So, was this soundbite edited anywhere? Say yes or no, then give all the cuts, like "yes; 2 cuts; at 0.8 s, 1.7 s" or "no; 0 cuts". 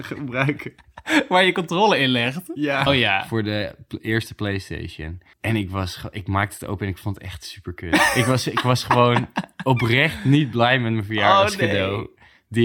yes; 2 cuts; at 2.9 s, 5.3 s